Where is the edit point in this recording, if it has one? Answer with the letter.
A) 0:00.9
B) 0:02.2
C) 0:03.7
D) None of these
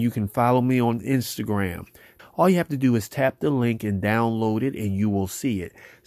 B